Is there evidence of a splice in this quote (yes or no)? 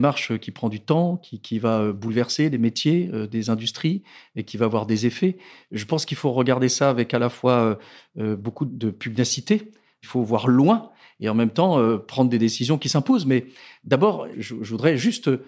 no